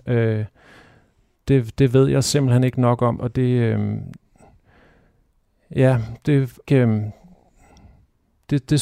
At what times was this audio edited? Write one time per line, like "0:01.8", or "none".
0:03.2
0:06.7